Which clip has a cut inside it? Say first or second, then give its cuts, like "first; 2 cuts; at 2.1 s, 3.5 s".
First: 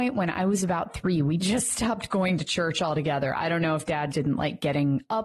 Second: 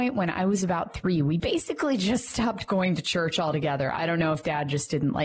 first; 2 cuts; at 1.4 s, 4.1 s